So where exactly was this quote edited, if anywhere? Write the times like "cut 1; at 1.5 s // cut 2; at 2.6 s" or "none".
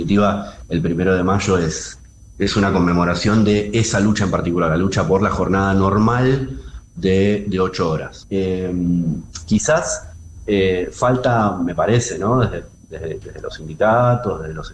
cut 1; at 8.2 s